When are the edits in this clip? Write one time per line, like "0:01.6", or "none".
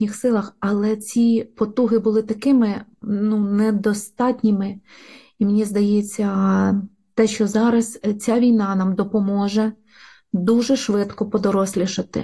none